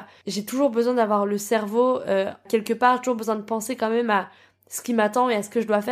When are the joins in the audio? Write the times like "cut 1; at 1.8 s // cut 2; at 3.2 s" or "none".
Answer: none